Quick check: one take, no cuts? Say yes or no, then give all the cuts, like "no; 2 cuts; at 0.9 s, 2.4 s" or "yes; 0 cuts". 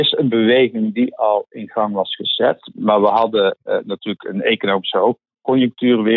yes; 0 cuts